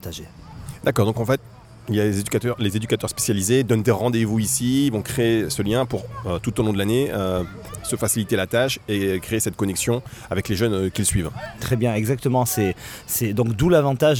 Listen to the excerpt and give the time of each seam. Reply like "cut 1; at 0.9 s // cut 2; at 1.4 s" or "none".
none